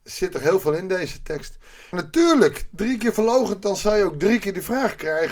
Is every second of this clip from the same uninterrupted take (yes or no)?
no